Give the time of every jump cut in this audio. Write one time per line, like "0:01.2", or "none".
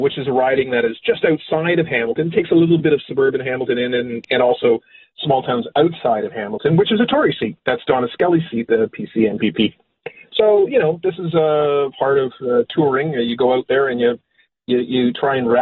none